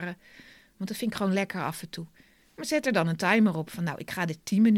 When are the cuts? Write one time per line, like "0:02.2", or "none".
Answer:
none